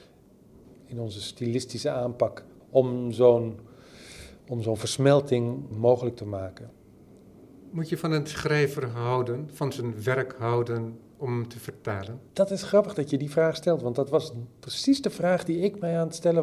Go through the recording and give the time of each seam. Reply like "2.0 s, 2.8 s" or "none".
5.7 s, 12.3 s